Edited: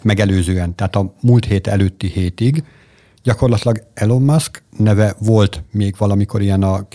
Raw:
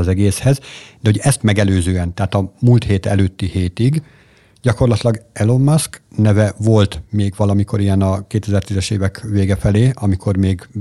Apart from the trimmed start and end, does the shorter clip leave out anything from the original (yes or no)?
no